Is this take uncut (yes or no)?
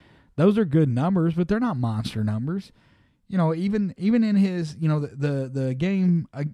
yes